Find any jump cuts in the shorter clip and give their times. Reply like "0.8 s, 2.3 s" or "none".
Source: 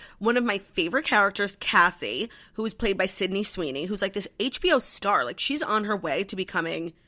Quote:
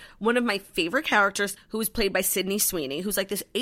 1.6 s